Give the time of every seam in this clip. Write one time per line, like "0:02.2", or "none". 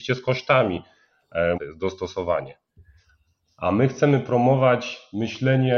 0:01.5